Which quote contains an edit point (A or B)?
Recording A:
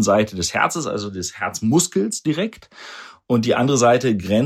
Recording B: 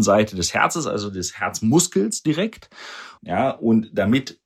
B